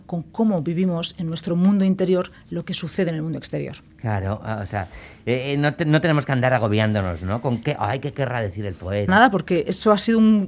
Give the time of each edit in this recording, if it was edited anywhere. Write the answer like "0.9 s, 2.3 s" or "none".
9.1 s